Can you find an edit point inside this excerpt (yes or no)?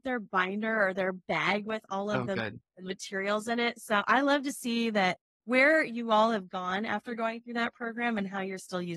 no